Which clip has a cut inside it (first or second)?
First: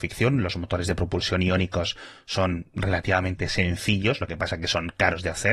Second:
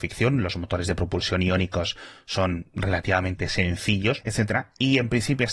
second